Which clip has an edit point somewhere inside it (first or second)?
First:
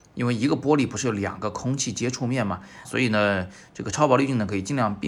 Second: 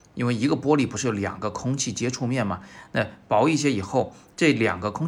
first